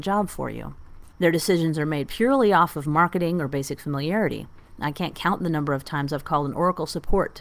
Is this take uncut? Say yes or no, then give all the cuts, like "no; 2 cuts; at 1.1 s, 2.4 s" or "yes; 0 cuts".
no; 1 cut; at 1.2 s